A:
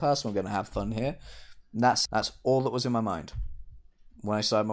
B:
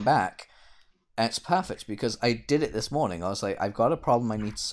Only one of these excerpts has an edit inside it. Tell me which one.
A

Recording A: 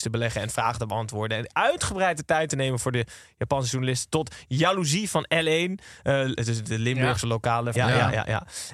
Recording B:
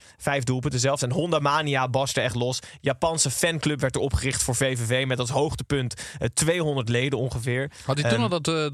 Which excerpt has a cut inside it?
A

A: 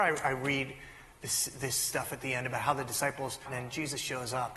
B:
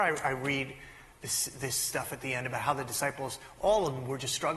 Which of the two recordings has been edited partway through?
A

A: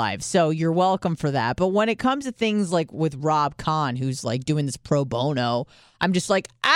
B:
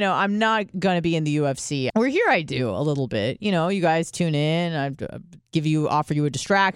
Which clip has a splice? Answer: B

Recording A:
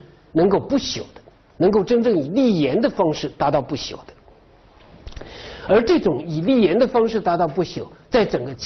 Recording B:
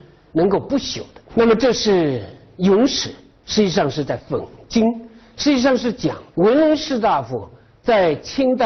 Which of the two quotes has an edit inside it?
B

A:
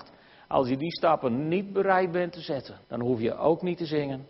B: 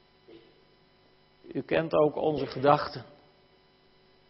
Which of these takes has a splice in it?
A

